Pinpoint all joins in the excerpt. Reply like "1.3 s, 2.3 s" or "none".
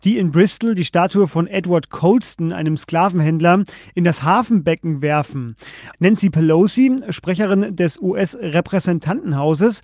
5.9 s